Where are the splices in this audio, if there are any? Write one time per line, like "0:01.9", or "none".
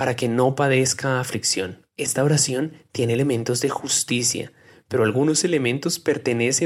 0:01.9